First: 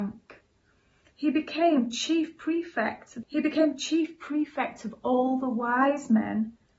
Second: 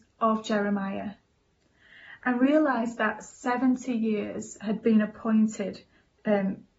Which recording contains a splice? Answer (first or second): first